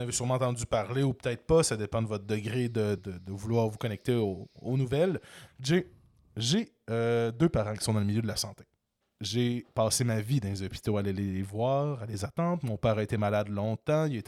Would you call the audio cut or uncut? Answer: cut